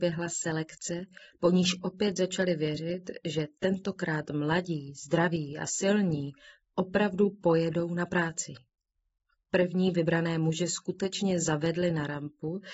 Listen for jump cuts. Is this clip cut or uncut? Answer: uncut